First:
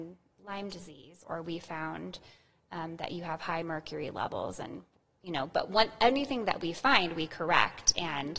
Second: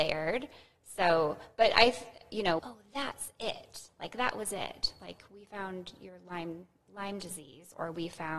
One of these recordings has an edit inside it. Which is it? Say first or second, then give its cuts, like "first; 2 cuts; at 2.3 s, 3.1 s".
second; 1 cut; at 2.6 s